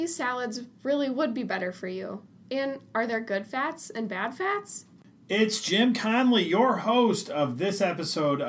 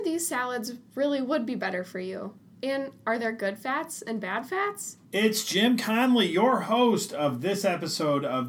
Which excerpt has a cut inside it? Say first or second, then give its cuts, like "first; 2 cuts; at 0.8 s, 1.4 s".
second; 1 cut; at 5.0 s